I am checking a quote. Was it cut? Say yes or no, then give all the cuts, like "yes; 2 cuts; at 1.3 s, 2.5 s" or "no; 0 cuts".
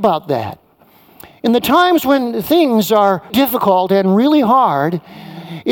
yes; 1 cut; at 3.3 s